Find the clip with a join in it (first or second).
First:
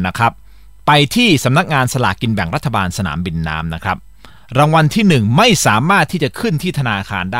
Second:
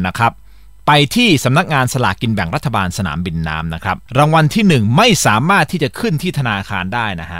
second